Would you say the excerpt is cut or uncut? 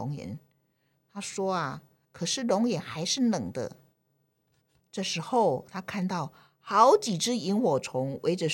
cut